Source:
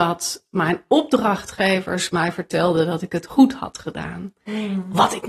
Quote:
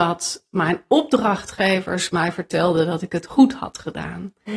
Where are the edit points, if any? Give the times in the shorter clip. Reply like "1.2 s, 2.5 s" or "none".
none